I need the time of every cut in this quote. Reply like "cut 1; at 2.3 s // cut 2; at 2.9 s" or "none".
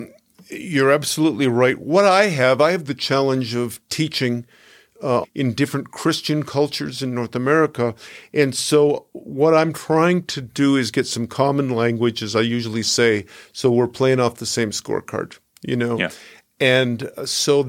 cut 1; at 5.2 s